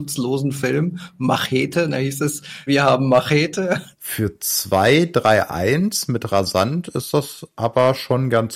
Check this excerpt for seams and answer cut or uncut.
cut